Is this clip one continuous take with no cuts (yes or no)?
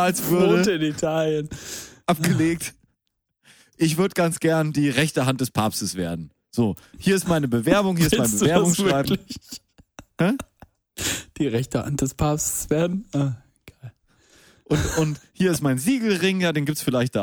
yes